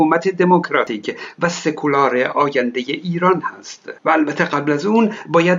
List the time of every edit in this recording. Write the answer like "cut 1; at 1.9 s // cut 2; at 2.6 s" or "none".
cut 1; at 4.0 s